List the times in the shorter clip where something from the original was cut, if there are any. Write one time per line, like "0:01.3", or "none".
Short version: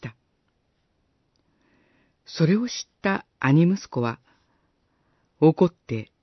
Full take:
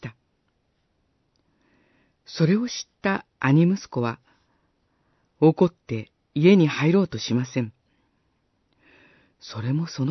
none